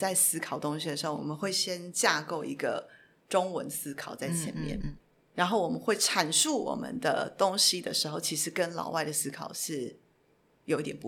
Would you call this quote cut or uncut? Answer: uncut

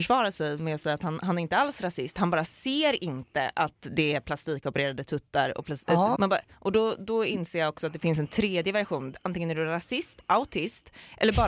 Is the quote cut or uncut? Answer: cut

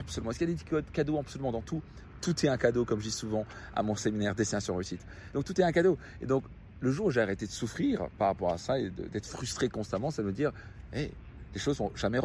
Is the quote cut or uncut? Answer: uncut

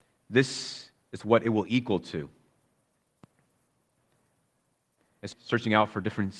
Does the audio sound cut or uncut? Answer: cut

